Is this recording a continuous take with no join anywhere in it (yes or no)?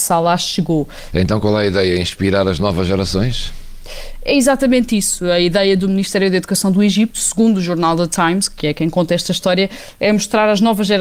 no